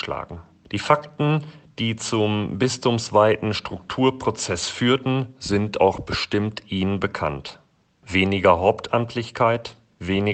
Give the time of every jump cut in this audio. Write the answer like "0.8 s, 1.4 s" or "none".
none